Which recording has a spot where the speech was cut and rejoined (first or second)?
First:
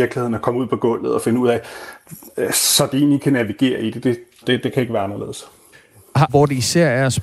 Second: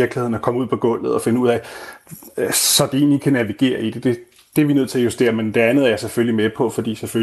first